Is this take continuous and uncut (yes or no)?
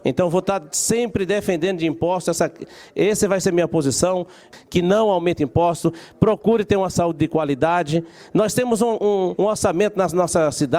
yes